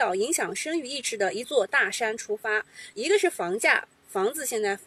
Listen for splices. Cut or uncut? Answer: cut